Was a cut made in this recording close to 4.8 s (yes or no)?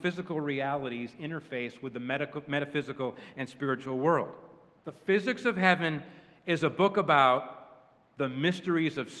yes